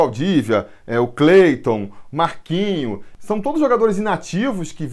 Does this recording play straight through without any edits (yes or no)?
no